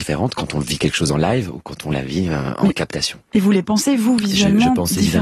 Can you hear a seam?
no; 0 cuts

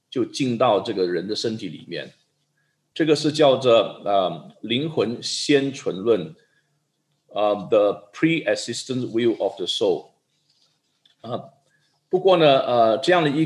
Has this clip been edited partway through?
no; 0 cuts

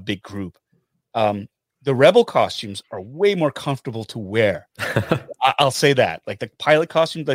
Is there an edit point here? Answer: no; 0 cuts

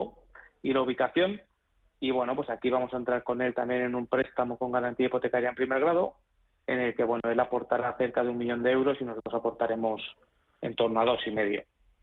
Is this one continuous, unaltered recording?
yes; 0 cuts

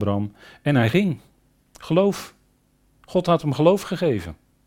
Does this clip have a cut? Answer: no; 0 cuts

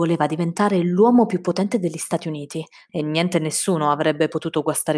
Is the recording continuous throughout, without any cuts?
no; 1 cut; at 2.9 s

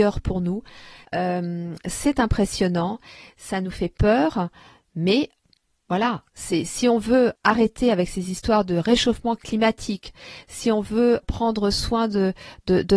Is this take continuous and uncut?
no; 2 cuts; at 1.0 s, 11.2 s

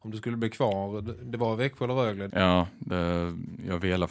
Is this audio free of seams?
no; 1 cut; at 2.3 s

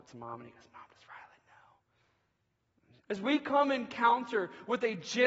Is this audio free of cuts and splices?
no; 1 cut; at 3.0 s

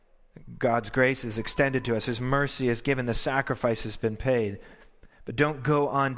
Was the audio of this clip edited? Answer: no; 0 cuts

